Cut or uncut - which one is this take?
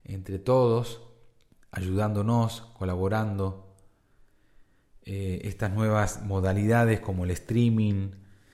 uncut